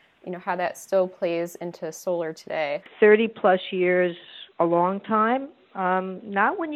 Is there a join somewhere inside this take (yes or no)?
yes